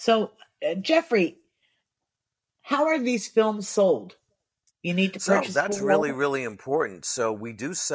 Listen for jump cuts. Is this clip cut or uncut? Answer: uncut